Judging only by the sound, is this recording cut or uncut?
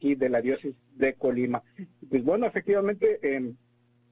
uncut